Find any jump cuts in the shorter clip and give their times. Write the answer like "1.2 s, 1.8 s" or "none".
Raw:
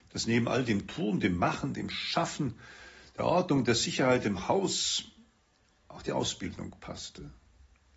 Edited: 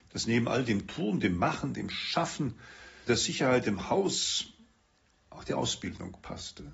3.1 s